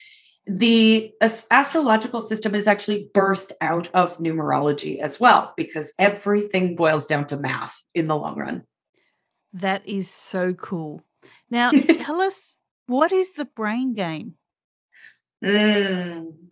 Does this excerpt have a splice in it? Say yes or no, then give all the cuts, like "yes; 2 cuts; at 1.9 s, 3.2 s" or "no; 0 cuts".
no; 0 cuts